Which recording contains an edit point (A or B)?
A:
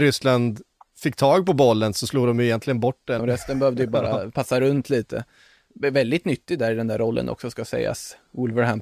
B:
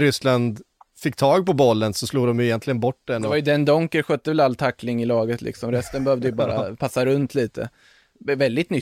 A